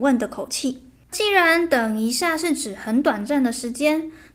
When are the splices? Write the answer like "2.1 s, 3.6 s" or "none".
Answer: 1.1 s